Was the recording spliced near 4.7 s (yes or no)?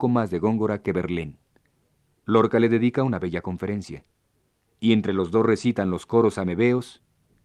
yes